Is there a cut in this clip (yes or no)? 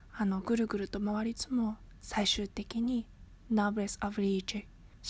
yes